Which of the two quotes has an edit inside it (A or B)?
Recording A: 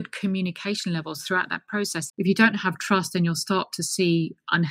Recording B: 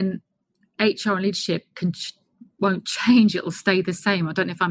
A